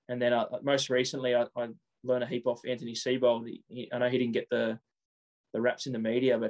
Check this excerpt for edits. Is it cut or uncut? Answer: uncut